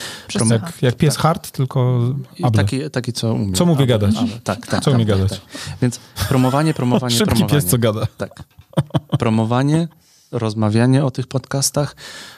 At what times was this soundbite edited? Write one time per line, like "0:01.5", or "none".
none

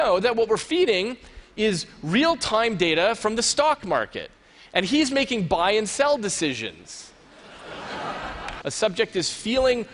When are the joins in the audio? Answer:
0:08.6

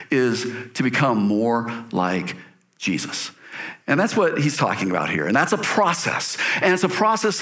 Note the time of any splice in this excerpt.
none

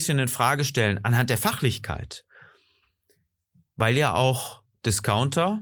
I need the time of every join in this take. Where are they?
none

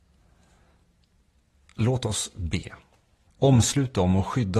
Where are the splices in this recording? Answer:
0:03.3

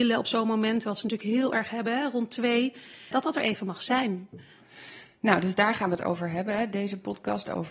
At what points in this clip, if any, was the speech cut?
0:03.1

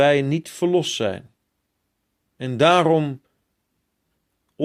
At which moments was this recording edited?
0:02.2

